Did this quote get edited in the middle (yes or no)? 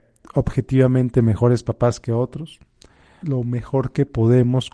yes